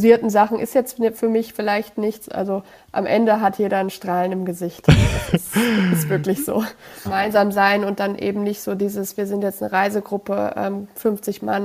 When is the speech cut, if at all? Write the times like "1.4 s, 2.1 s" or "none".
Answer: 7.1 s